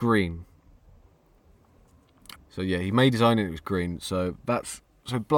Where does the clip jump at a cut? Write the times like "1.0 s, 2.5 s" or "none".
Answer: 2.3 s